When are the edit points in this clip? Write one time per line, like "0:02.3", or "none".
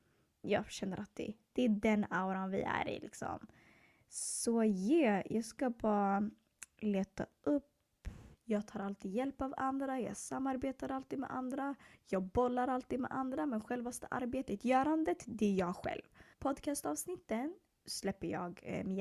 0:08.3
0:16.3